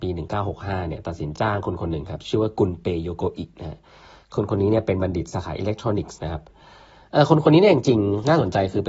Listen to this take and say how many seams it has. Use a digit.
1